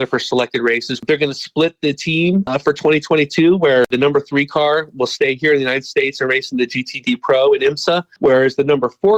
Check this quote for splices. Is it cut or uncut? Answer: cut